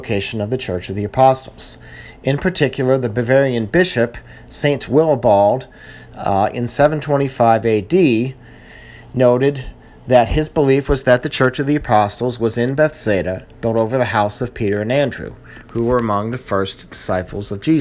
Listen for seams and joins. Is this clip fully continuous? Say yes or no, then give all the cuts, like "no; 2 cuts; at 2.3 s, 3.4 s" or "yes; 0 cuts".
yes; 0 cuts